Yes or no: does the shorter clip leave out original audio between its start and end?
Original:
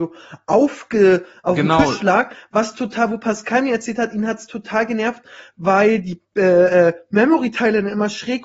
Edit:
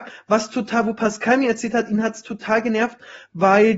no